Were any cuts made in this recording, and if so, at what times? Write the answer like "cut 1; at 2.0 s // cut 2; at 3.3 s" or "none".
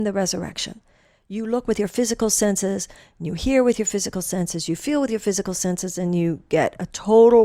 none